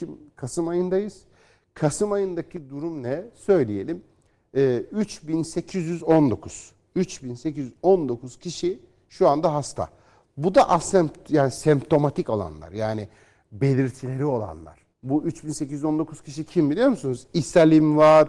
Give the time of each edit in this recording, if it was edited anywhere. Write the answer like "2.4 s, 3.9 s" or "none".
14.9 s